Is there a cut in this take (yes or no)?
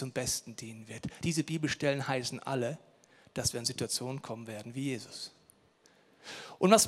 no